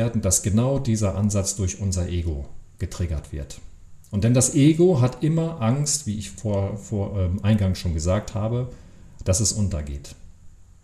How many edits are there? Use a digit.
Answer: 0